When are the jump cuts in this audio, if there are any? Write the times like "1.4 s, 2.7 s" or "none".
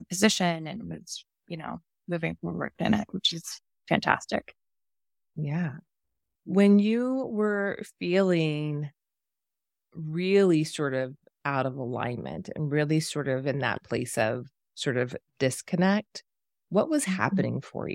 none